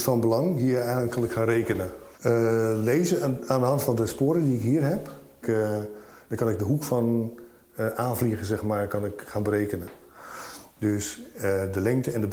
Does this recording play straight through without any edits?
no; 2 cuts; at 2.2 s, 5.4 s

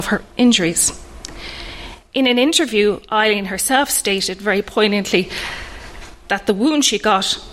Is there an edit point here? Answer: no; 0 cuts

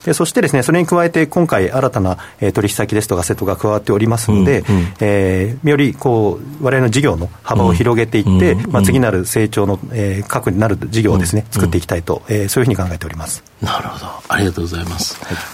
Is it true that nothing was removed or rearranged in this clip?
yes; 0 cuts

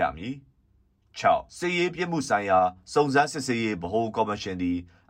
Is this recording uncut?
no; 1 cut; at 1.5 s

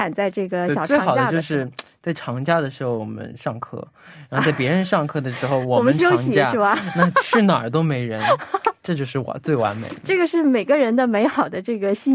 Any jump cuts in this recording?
no; 0 cuts

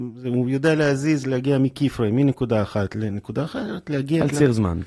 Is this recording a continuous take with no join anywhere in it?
yes; 0 cuts

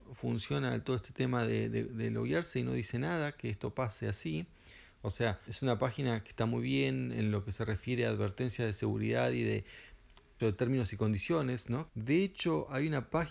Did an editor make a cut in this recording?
yes; 3 cuts; at 5.5 s, 10.4 s, 11.9 s

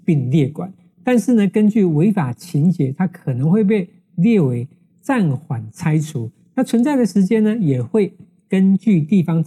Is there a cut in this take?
no; 0 cuts

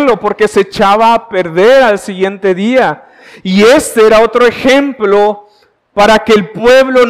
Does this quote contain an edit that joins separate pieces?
no; 0 cuts

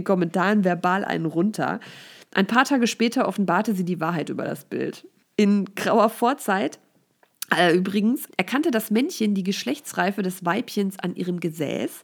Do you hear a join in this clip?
yes; 2 cuts; at 5.2 s, 8.3 s

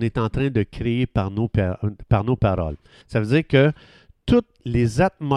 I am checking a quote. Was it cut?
yes; 1 cut; at 3.0 s

